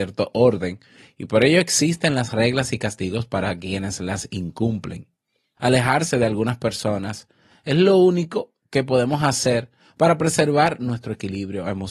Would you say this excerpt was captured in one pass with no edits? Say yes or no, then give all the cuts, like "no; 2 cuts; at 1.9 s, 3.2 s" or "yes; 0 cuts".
no; 1 cut; at 5.6 s